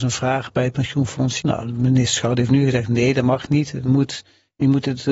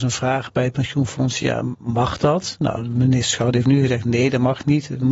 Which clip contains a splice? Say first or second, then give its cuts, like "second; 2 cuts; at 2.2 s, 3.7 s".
first; 1 cut; at 1.4 s